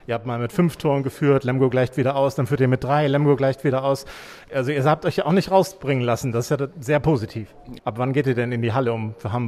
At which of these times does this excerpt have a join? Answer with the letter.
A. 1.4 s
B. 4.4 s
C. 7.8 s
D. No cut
C